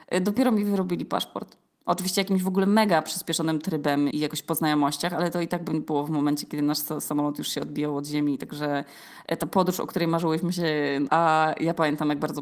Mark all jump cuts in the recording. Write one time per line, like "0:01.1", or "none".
0:04.1
0:11.1